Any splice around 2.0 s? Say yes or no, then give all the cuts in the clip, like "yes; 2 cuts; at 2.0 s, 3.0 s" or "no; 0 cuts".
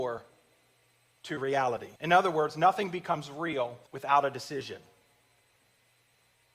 yes; 2 cuts; at 2.0 s, 3.9 s